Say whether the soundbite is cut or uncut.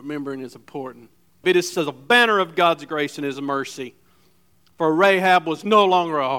cut